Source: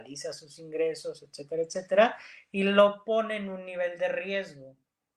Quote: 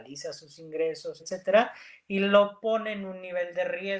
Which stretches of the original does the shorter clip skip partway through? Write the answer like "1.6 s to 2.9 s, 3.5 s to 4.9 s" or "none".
1.2 s to 1.6 s